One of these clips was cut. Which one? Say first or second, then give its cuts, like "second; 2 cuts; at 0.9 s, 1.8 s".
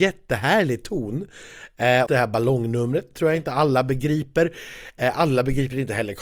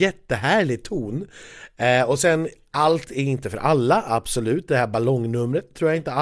first; 1 cut; at 2.1 s